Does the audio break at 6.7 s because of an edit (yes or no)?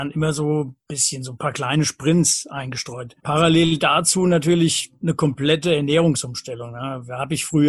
no